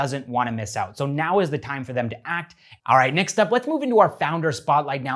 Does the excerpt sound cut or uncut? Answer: cut